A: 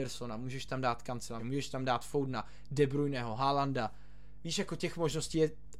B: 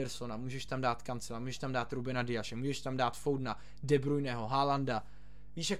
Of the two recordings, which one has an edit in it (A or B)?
A